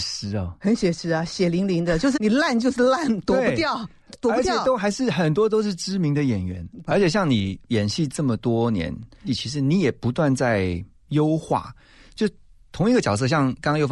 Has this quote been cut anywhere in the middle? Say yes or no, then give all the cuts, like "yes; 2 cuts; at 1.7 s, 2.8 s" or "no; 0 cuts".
yes; 3 cuts; at 2.1 s, 6.9 s, 9.3 s